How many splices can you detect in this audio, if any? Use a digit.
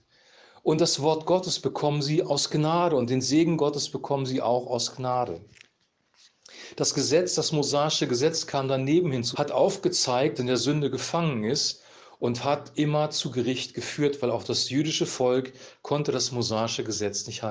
2